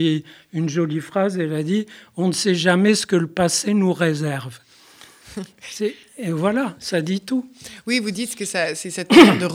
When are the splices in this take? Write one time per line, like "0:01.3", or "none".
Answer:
none